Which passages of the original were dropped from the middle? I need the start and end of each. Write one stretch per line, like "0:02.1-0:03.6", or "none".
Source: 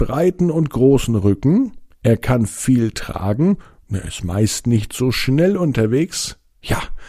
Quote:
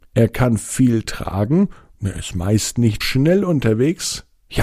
0:04.9-0:05.1